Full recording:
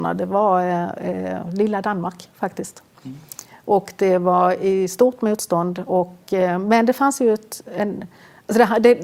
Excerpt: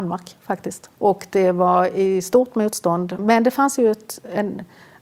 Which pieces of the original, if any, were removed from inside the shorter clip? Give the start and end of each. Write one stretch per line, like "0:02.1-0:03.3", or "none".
0:02.9-0:03.6
0:05.9-0:06.6